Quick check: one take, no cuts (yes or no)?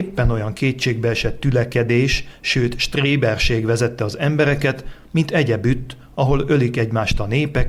no